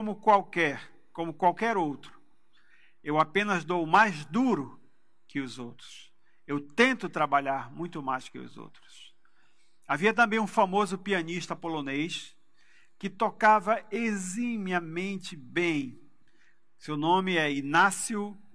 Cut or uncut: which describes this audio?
uncut